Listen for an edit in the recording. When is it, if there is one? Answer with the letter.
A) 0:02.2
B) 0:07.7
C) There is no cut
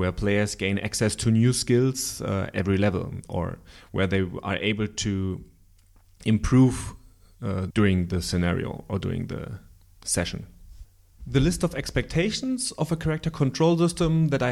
B